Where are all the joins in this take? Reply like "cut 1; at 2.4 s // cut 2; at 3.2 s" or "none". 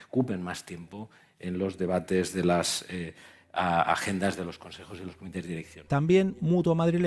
none